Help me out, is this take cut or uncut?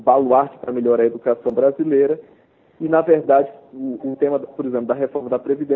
cut